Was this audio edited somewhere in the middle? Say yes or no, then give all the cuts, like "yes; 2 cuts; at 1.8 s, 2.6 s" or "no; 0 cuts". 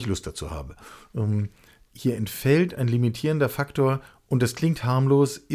yes; 1 cut; at 1.1 s